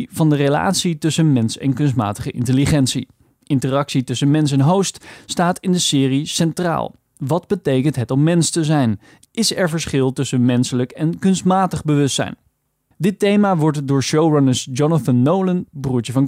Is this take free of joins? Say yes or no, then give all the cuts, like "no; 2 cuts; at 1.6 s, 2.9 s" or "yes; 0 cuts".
yes; 0 cuts